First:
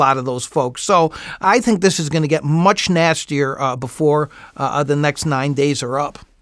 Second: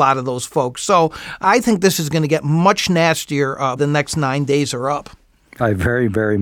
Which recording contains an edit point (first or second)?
second